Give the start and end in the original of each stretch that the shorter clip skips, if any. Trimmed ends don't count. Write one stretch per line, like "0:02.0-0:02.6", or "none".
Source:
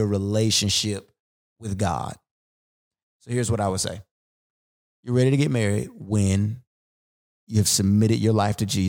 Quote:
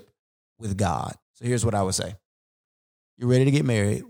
0:02.2-0:03.1